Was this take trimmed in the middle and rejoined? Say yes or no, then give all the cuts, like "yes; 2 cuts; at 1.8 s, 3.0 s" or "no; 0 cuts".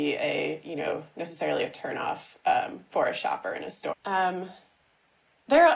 yes; 1 cut; at 3.9 s